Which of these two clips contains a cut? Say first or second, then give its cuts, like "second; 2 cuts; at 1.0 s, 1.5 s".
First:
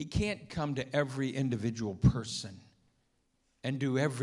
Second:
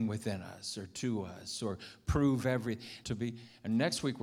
second; 1 cut; at 3.0 s